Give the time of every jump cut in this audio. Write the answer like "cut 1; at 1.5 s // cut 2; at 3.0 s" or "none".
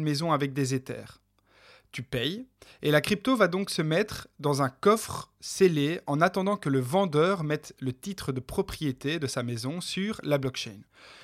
none